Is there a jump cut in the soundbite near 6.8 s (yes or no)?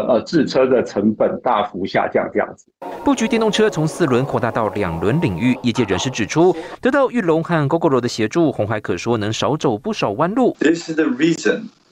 no